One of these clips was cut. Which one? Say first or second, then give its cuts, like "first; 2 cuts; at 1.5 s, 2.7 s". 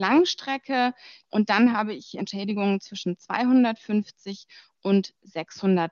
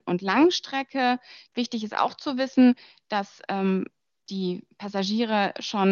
second; 1 cut; at 1.5 s